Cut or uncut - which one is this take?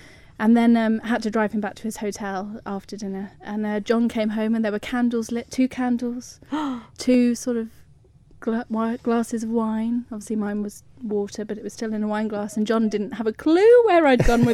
uncut